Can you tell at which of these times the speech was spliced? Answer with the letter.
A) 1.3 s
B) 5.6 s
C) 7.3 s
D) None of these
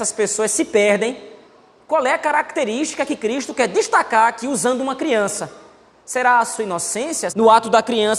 C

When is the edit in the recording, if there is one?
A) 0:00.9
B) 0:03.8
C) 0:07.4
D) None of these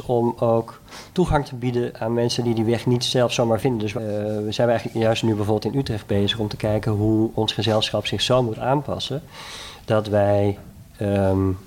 D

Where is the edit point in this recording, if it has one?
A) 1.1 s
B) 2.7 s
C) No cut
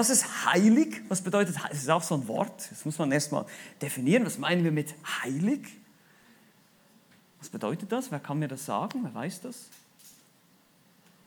C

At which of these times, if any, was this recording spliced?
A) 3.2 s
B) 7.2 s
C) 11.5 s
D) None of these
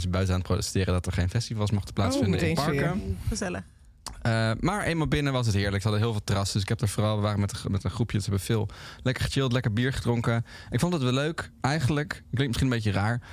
D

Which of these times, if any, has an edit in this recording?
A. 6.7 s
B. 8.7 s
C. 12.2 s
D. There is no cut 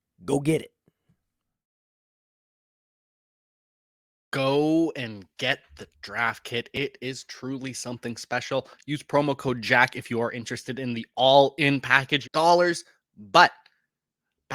C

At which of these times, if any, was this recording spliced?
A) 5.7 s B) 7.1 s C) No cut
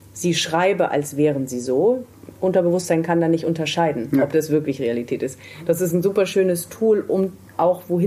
C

